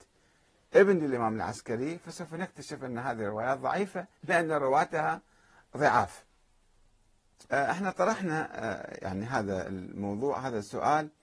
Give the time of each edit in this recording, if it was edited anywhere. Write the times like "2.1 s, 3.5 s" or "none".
7.5 s